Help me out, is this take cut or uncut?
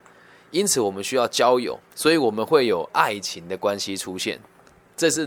cut